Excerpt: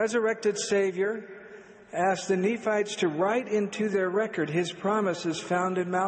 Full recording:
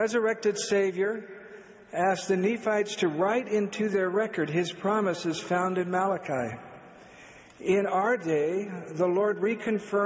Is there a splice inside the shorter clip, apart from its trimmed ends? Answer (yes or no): no